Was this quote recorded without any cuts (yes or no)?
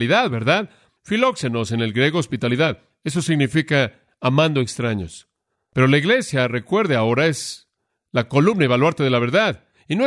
yes